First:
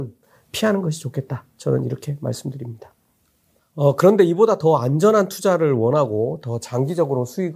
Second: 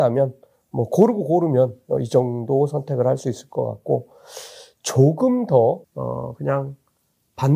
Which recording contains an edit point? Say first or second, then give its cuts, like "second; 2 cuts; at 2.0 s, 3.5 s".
second; 1 cut; at 5.8 s